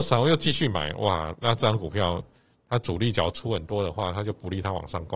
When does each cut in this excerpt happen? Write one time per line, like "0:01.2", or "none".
0:01.3